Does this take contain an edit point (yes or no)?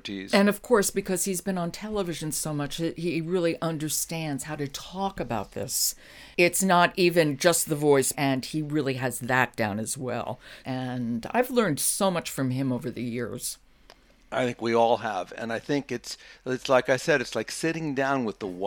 yes